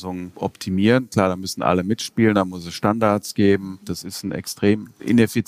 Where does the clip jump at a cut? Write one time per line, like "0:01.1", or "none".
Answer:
0:03.8